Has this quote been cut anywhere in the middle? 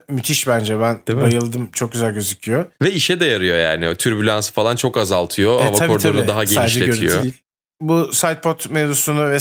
no; 0 cuts

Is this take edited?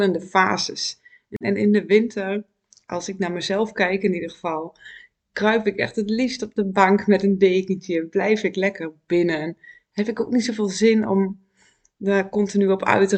yes; 1 cut; at 1.4 s

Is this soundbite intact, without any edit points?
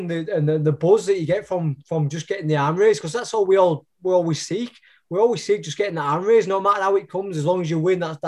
yes; 0 cuts

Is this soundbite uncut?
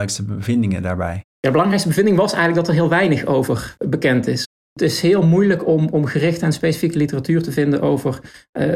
yes; 0 cuts

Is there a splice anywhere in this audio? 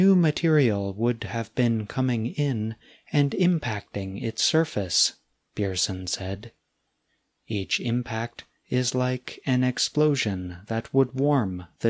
no; 0 cuts

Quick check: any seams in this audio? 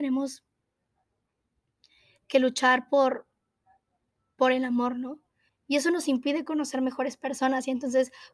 yes; 1 cut; at 5.5 s

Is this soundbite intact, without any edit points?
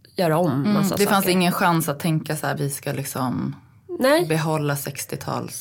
no; 1 cut; at 2.6 s

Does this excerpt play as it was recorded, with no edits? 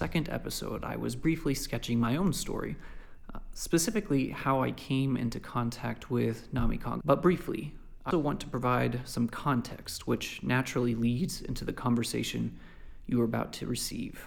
no; 2 cuts; at 7.0 s, 8.1 s

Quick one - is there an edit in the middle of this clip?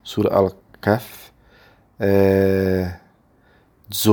no; 0 cuts

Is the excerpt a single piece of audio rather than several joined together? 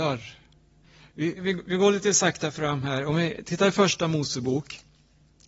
no; 1 cut; at 1.4 s

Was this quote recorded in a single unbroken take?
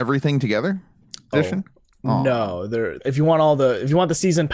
no; 2 cuts; at 1.3 s, 3.0 s

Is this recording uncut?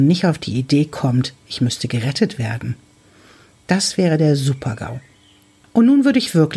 yes; 0 cuts

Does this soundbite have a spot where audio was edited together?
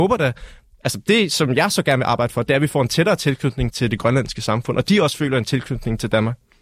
yes; 1 cut; at 3.7 s

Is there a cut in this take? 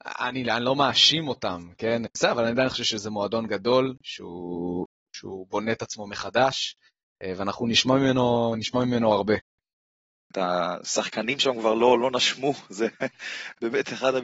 yes; 2 cuts; at 2.1 s, 10.2 s

